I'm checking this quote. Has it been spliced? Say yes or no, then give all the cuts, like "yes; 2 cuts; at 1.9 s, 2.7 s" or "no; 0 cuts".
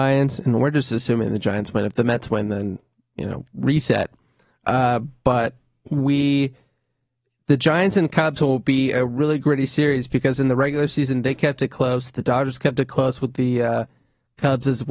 no; 0 cuts